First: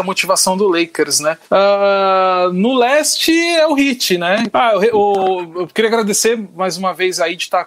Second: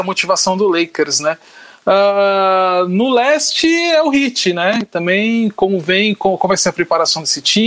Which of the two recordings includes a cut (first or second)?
first